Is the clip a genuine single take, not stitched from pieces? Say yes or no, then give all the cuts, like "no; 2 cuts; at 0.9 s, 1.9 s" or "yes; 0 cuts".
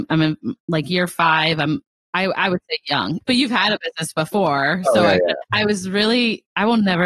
no; 2 cuts; at 3.2 s, 5.4 s